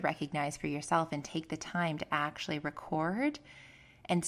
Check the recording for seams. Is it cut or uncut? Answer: uncut